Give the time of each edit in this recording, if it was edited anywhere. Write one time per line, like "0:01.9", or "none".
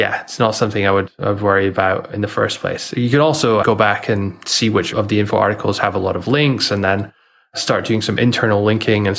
0:03.6